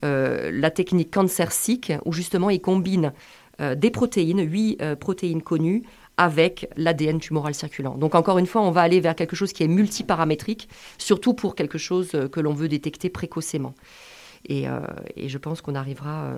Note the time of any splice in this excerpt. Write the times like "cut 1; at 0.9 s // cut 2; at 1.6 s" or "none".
none